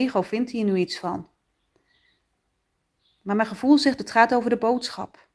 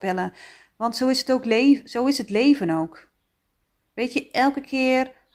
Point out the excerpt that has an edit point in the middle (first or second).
first